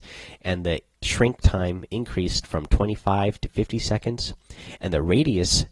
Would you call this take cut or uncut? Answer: cut